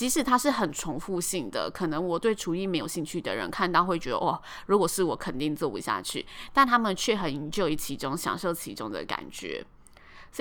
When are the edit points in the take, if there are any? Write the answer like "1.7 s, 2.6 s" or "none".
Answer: none